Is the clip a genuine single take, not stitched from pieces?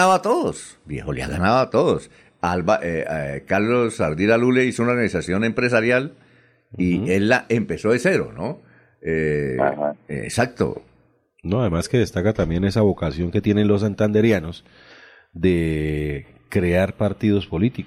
yes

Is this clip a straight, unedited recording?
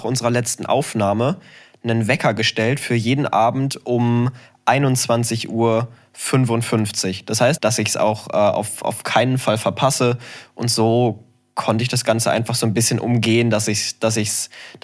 no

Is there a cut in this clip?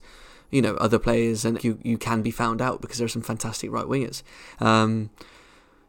yes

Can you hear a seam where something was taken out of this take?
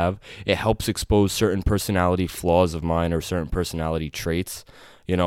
no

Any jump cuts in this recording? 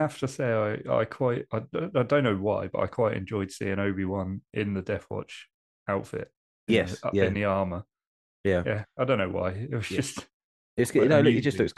no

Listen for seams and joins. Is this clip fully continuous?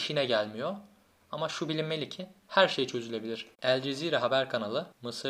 no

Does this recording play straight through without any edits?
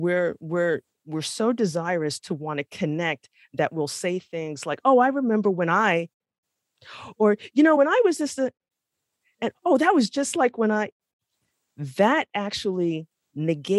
yes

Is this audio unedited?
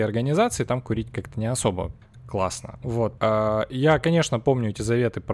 no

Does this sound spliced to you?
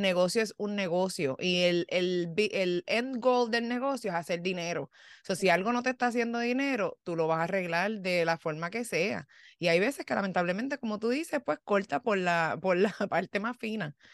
no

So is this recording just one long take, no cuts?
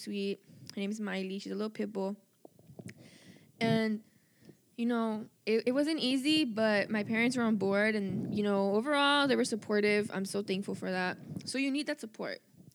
yes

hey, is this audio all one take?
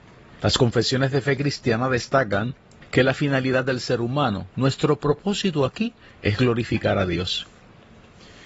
yes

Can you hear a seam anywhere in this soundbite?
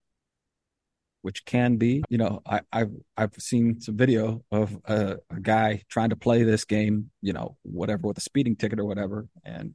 yes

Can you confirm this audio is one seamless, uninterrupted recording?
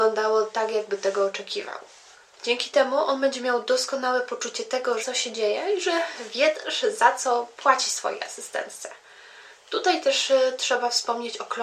no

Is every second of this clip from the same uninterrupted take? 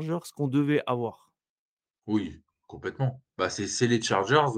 yes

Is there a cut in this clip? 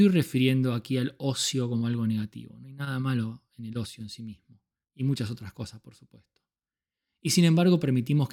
yes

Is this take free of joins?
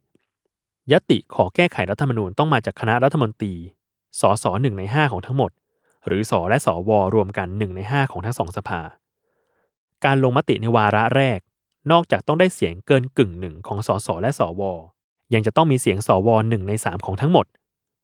no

